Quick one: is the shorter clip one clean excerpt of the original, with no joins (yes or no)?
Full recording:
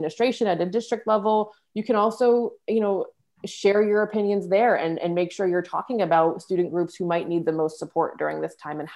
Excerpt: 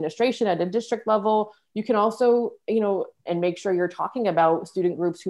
no